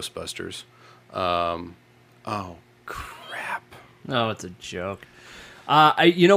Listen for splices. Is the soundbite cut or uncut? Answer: uncut